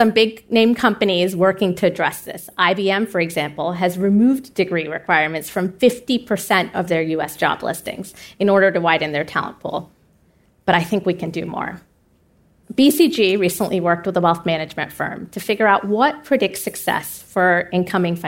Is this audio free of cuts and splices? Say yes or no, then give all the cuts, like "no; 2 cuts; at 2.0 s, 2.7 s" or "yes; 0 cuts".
yes; 0 cuts